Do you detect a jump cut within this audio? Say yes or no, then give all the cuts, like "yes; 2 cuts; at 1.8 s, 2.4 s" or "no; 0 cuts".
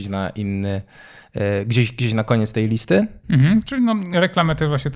yes; 1 cut; at 3.2 s